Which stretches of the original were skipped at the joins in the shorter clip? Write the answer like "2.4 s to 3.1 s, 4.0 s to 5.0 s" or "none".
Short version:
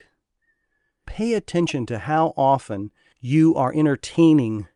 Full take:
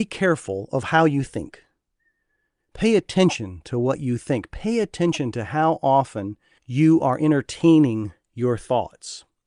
2.6 s to 4.5 s